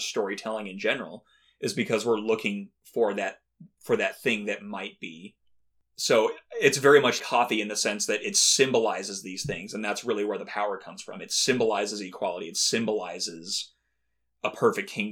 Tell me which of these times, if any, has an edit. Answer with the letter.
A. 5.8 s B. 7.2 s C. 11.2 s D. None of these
B